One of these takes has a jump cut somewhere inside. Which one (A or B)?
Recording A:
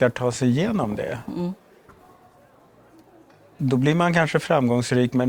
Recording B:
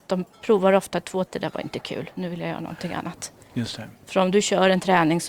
B